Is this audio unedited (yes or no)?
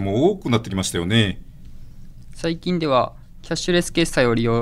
no